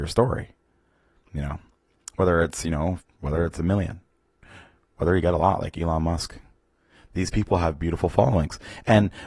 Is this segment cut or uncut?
cut